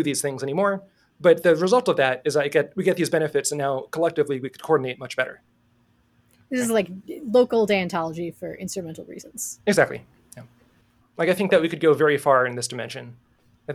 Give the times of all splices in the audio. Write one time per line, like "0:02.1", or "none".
0:11.0

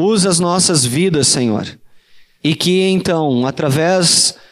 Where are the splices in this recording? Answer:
0:02.4

